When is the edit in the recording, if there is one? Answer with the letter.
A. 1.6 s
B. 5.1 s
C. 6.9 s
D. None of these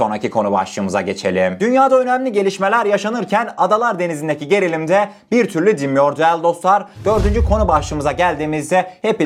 D